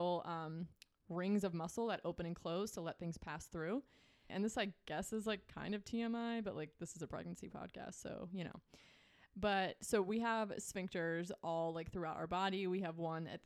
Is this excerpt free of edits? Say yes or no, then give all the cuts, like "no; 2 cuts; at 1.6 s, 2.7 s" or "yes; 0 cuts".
no; 1 cut; at 4.3 s